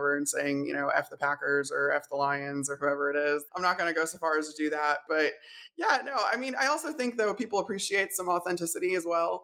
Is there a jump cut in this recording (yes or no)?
yes